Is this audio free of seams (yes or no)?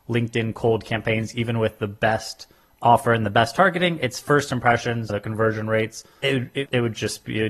yes